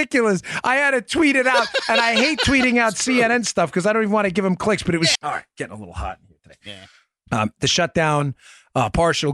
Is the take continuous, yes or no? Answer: no